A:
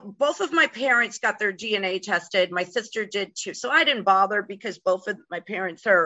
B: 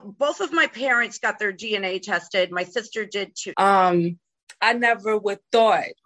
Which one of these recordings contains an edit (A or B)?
B